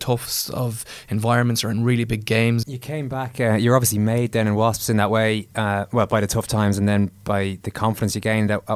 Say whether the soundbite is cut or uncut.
cut